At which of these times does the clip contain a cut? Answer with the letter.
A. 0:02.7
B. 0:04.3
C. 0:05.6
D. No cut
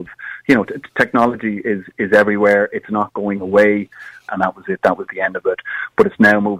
B